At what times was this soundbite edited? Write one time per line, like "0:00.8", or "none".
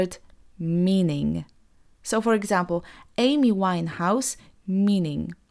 0:04.5